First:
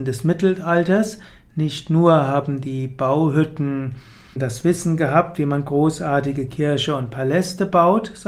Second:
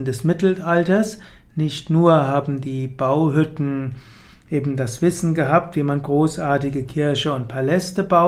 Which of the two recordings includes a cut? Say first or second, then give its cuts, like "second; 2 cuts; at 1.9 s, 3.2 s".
first; 1 cut; at 4.4 s